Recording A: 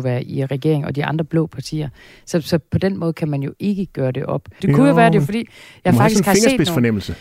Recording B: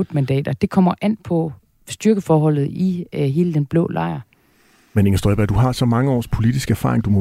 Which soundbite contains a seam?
A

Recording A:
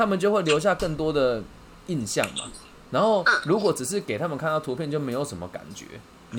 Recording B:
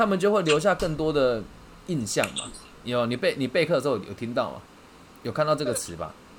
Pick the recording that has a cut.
B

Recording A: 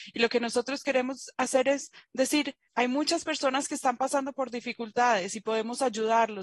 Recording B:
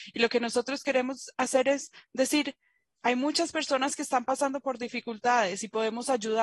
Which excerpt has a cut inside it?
A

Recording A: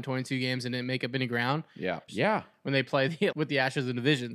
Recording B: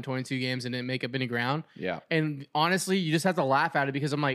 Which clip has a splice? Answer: A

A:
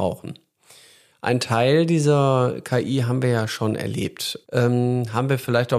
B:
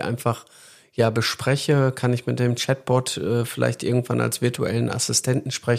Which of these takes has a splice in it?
A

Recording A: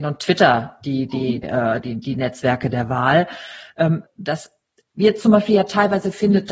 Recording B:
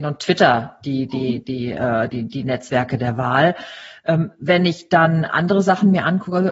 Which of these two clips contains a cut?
A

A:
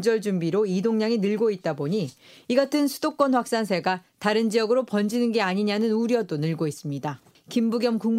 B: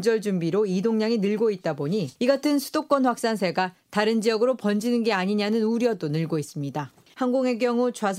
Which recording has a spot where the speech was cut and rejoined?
B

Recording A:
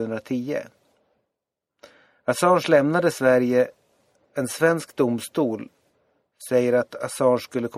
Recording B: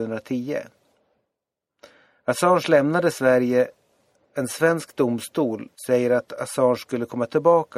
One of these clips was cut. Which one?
B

